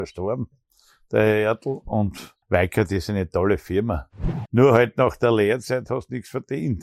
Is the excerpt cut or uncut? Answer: cut